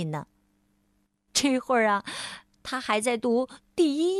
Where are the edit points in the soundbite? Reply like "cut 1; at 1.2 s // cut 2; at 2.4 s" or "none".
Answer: cut 1; at 1.3 s